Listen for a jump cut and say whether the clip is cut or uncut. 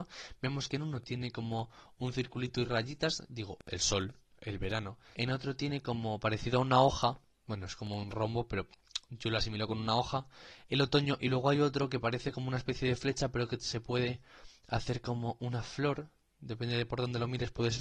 cut